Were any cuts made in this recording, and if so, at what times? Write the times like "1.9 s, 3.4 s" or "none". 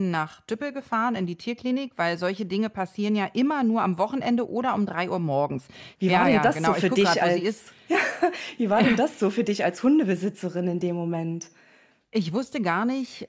6.0 s